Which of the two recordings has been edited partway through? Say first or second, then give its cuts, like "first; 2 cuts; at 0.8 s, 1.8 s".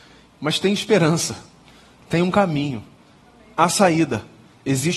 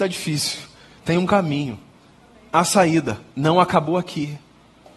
second; 2 cuts; at 1.0 s, 3.3 s